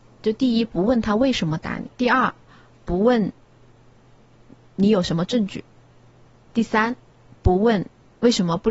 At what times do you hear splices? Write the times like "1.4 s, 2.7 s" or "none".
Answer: 1.9 s